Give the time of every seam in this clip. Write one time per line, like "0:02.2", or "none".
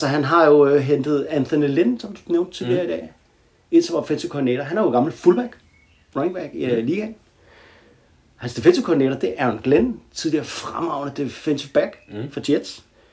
none